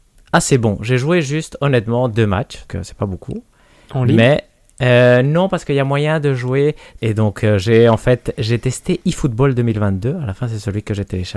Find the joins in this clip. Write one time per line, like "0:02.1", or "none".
0:02.7
0:07.0

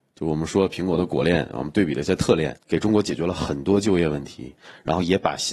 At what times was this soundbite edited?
0:02.6

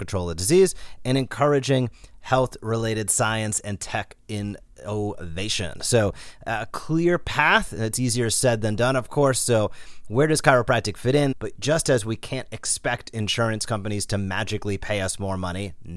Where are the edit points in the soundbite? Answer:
0:11.3

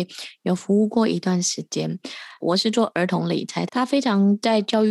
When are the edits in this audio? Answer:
0:02.4
0:03.7

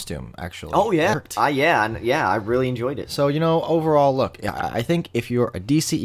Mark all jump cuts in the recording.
0:01.1

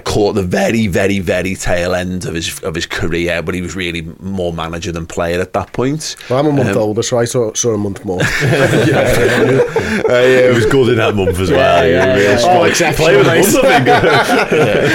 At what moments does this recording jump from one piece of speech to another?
none

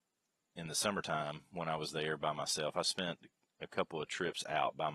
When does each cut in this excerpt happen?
none

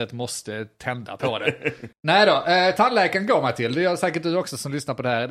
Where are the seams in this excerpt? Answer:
0:01.9

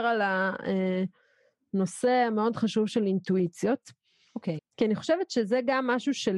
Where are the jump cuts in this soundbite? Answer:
0:04.6

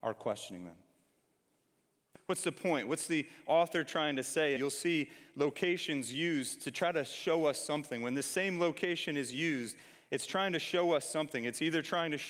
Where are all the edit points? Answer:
0:02.1
0:04.6

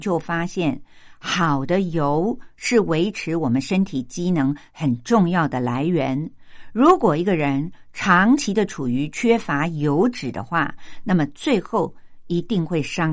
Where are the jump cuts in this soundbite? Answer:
none

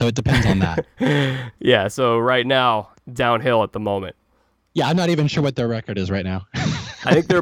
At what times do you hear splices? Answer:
none

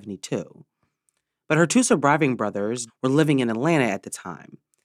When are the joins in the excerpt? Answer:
0:02.9

